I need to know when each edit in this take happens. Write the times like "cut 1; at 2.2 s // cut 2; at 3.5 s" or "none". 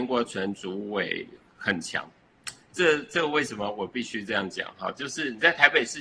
none